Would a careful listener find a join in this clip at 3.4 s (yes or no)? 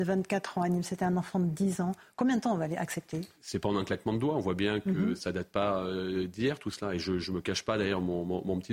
yes